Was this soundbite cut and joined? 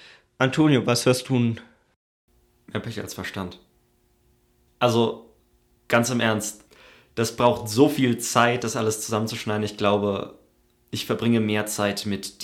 no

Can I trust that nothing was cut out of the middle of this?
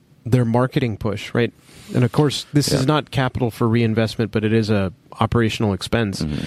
yes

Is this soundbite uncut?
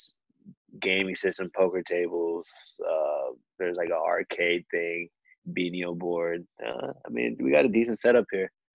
yes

